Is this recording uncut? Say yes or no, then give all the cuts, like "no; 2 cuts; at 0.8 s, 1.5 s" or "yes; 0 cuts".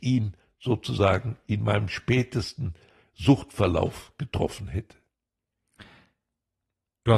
yes; 0 cuts